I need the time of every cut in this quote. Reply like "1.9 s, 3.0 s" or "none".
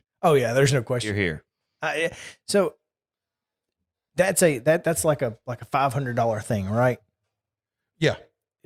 none